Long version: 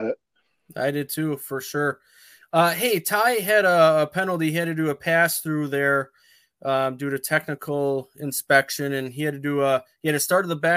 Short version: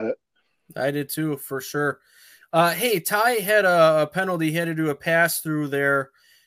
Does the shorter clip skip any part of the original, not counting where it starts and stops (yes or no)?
no